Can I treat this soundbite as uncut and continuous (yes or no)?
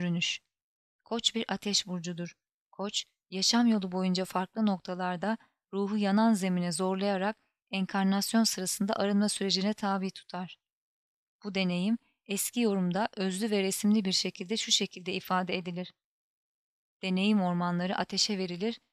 yes